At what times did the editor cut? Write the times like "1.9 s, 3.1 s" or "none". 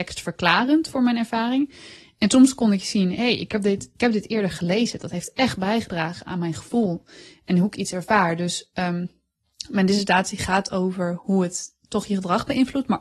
none